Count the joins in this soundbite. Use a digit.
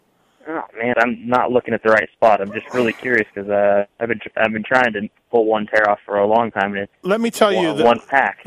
1